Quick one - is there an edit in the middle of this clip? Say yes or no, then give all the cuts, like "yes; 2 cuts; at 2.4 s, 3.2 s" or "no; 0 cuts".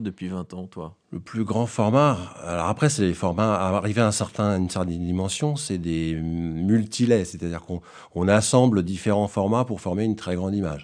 no; 0 cuts